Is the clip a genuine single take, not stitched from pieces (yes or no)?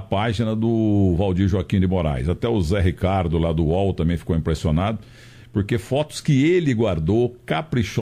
yes